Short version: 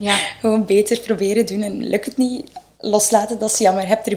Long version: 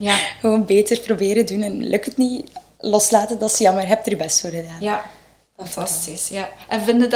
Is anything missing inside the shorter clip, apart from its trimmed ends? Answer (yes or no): no